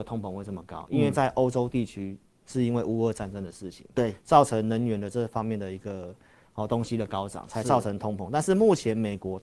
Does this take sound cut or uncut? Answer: uncut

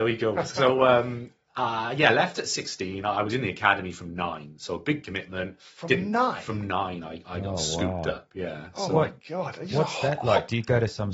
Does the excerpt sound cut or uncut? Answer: uncut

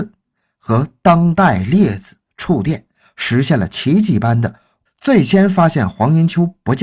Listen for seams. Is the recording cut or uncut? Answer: cut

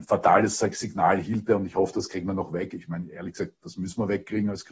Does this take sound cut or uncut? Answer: uncut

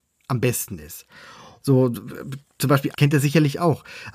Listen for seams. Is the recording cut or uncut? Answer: cut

